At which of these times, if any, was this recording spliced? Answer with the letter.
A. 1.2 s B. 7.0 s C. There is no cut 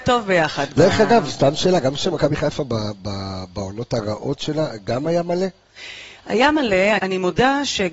B